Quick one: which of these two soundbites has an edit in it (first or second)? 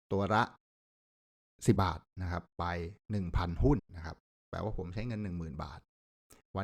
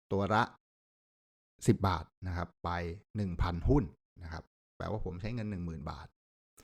first